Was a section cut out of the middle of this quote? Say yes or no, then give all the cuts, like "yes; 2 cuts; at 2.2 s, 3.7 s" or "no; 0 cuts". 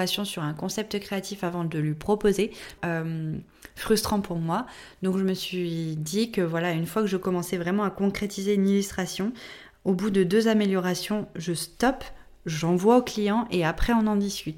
yes; 1 cut; at 2.8 s